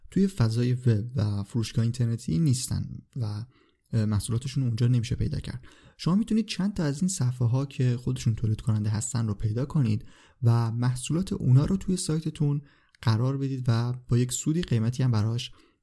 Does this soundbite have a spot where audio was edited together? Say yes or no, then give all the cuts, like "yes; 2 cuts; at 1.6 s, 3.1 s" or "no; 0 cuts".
no; 0 cuts